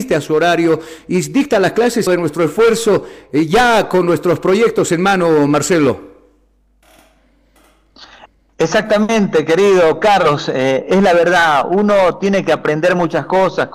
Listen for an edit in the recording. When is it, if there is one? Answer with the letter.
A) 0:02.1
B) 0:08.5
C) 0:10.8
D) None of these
A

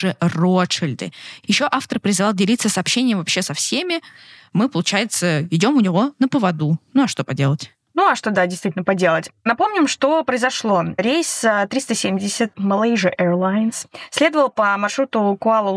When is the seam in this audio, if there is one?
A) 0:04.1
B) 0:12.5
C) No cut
B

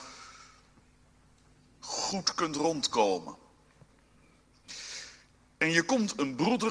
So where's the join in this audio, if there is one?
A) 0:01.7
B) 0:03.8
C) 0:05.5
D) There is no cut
D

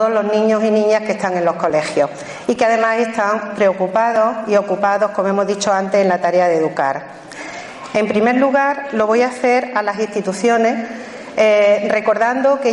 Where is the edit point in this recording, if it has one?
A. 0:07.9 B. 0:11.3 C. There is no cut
A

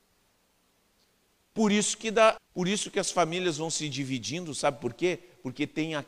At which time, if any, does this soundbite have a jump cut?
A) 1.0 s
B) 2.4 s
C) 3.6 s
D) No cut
B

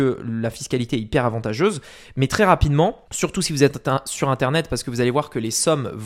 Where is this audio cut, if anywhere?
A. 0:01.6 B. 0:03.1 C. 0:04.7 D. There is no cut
B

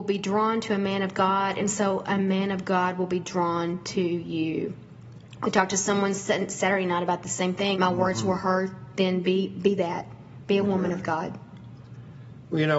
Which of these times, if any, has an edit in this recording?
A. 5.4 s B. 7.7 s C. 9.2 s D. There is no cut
B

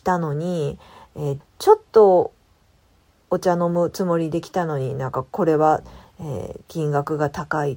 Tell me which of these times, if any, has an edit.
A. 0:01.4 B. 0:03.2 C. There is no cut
A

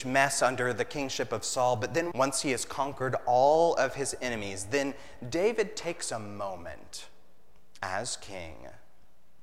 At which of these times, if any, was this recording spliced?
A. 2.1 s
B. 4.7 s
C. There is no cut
A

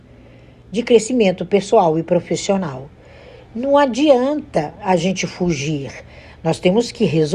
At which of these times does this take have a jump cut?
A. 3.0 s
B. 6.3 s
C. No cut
C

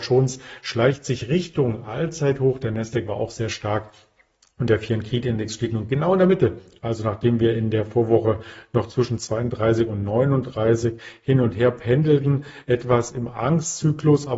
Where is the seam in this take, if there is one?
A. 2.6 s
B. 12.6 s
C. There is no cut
C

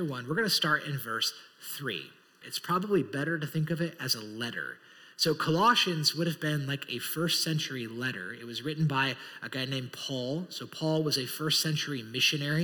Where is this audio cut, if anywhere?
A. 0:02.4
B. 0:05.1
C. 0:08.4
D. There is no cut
A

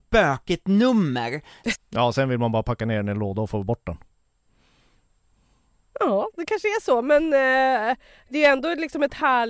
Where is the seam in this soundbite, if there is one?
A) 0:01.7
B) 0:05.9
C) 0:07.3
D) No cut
A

